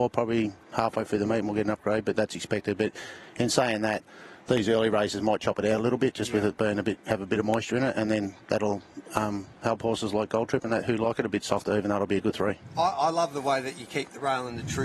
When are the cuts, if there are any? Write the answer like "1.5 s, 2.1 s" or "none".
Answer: none